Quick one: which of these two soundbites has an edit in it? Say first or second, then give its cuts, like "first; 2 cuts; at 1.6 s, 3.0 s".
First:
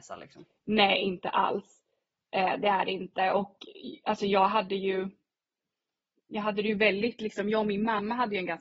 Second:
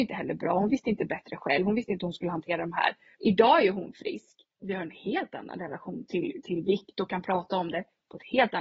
second; 1 cut; at 3.1 s